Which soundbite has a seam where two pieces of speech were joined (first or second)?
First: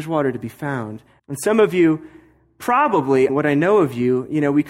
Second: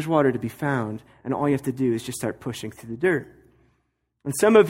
first